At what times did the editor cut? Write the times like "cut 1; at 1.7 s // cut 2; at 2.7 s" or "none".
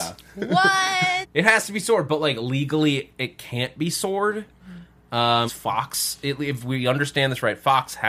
cut 1; at 1.2 s // cut 2; at 5.5 s